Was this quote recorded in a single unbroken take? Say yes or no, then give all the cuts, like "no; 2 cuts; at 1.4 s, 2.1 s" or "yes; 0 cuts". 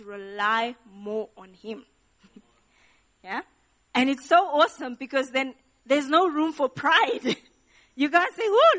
yes; 0 cuts